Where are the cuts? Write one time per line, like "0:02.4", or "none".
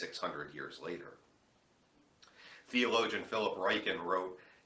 none